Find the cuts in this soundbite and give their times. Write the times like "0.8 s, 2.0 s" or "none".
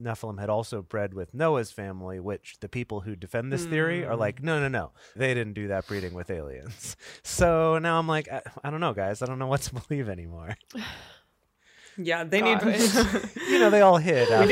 5.2 s, 12.6 s